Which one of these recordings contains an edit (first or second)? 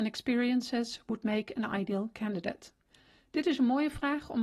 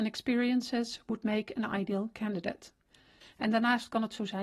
second